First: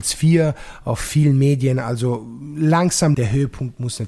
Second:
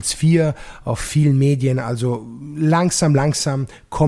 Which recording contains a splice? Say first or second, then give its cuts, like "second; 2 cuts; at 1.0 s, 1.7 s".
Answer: first; 1 cut; at 3.1 s